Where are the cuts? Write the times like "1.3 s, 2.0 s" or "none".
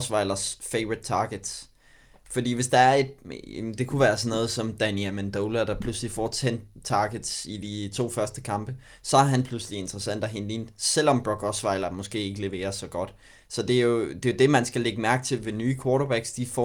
none